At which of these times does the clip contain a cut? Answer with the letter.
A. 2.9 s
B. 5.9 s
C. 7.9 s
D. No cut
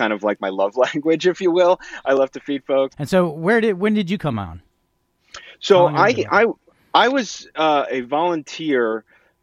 A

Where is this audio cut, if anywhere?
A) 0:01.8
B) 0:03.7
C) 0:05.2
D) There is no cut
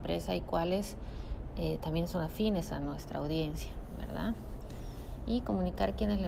D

